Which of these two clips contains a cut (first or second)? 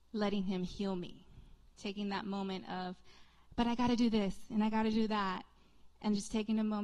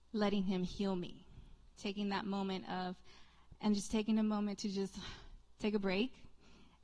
second